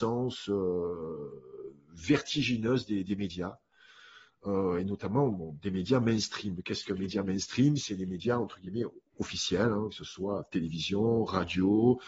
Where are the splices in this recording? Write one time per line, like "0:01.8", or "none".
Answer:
none